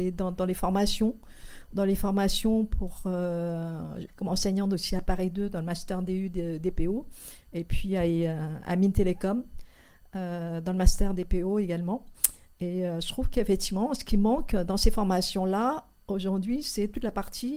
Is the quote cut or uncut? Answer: cut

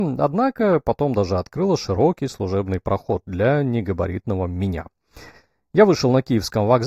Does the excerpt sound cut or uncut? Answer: uncut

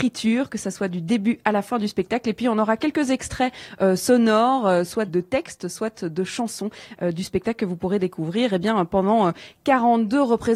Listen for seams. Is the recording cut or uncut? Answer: cut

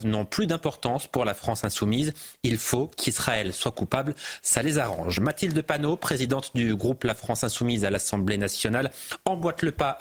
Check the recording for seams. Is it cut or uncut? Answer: uncut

